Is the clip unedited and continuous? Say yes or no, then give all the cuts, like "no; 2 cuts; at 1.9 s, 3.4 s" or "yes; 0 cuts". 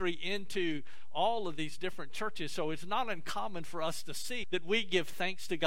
no; 1 cut; at 4.4 s